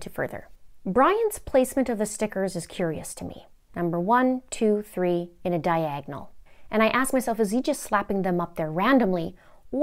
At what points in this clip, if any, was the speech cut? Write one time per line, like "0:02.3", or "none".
none